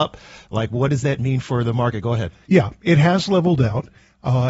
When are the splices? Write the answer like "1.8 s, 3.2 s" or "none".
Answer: 2.5 s